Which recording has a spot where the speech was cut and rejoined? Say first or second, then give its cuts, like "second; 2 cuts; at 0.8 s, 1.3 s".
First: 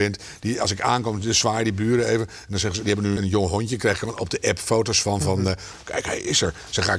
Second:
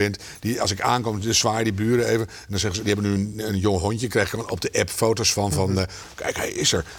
first; 1 cut; at 3.2 s